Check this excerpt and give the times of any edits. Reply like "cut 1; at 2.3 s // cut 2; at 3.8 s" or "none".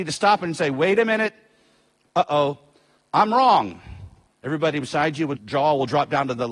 cut 1; at 4.3 s // cut 2; at 5.4 s

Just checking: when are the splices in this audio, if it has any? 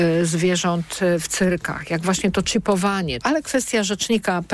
cut 1; at 3.2 s

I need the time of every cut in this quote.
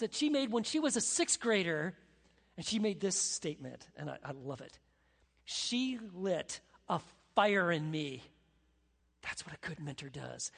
none

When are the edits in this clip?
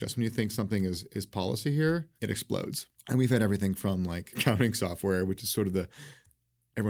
cut 1; at 2.1 s

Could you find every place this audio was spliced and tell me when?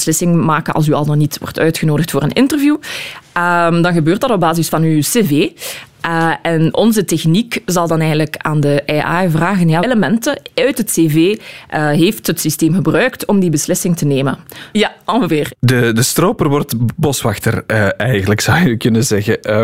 cut 1; at 9.8 s // cut 2; at 14.7 s

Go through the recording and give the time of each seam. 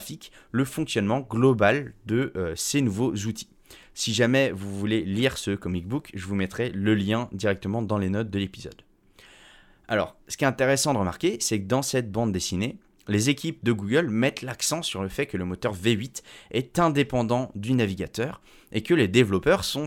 none

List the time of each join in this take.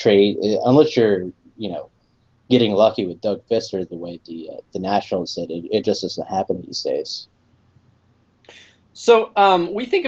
none

